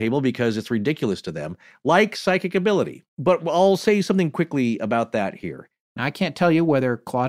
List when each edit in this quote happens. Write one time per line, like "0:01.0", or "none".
0:03.1
0:05.8